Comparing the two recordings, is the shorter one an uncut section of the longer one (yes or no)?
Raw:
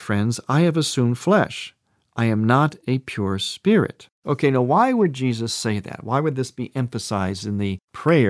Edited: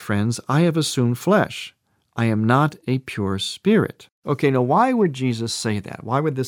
yes